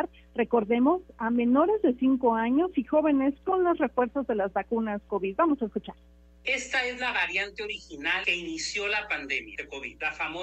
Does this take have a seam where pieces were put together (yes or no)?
no